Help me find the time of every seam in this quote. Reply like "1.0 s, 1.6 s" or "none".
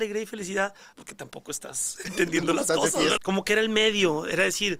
0.9 s, 3.2 s